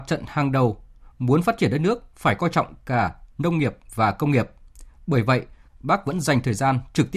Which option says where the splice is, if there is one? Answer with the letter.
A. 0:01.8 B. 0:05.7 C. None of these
B